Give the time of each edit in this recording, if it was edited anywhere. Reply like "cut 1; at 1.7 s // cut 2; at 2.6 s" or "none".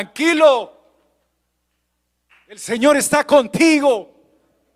none